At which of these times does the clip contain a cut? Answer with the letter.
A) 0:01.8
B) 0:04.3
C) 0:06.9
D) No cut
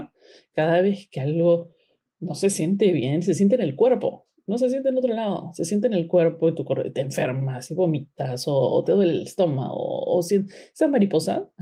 D